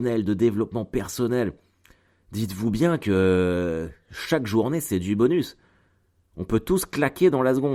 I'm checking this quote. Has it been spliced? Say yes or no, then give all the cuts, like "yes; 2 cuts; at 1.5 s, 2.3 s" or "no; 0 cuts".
no; 0 cuts